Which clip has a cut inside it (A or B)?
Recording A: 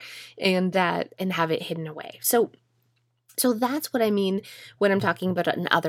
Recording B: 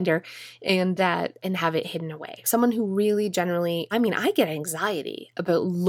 B